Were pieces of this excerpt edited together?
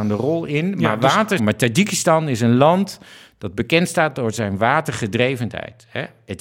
yes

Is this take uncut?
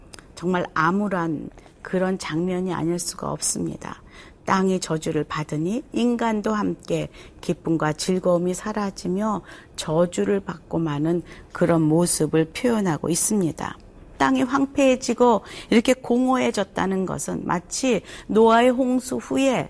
yes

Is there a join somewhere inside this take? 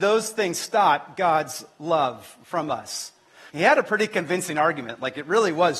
yes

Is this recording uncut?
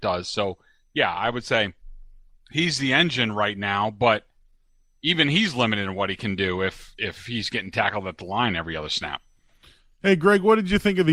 yes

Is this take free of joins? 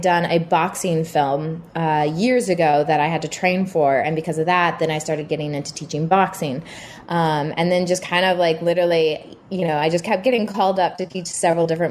yes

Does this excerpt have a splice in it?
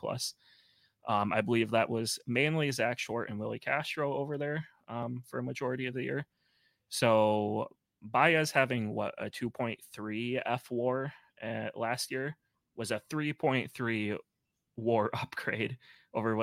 no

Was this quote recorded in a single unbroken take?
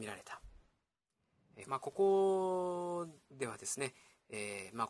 no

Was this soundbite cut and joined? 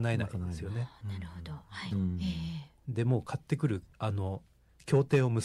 yes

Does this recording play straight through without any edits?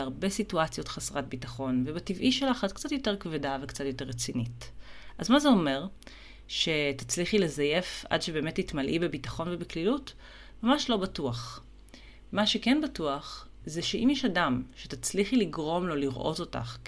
yes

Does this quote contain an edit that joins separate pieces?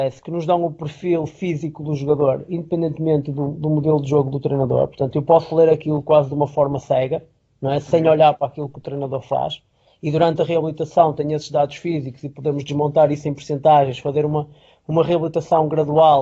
no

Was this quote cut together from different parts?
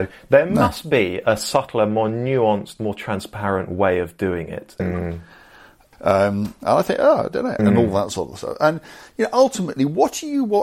yes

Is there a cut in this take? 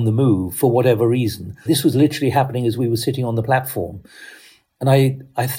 yes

